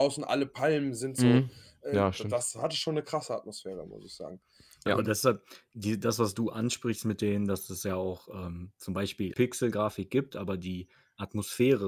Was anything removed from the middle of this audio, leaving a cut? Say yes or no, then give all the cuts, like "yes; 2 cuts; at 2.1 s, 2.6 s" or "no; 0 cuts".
yes; 1 cut; at 9.3 s